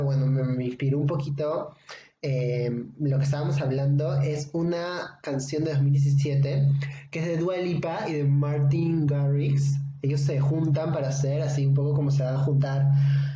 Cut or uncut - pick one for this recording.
uncut